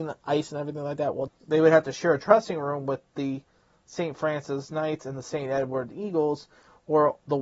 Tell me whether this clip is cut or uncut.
cut